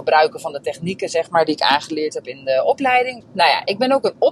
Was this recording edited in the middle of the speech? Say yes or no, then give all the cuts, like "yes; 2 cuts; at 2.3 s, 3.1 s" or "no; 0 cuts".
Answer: yes; 1 cut; at 3.2 s